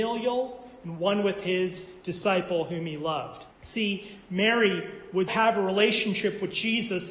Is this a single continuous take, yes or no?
no